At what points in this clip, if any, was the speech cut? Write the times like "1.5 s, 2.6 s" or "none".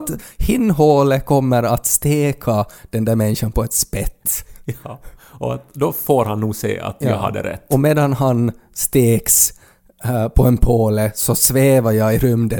none